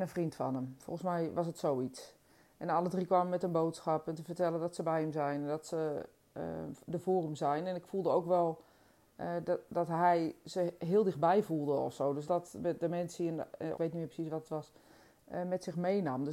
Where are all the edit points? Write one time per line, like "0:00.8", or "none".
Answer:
0:12.2
0:13.7